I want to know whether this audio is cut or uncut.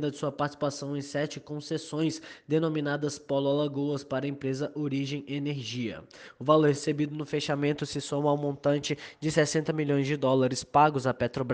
uncut